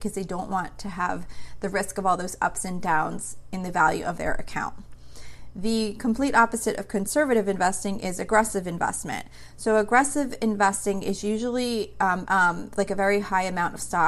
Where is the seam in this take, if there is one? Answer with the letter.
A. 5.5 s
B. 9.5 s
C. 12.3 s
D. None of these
C